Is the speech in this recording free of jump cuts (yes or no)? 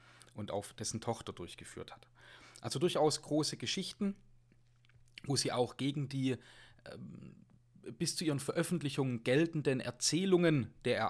yes